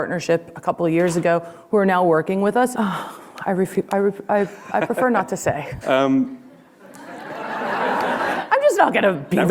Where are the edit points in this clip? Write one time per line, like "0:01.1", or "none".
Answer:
0:02.7
0:05.8